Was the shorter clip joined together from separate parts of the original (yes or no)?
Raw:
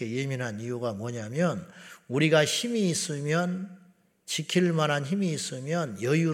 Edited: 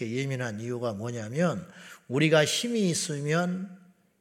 no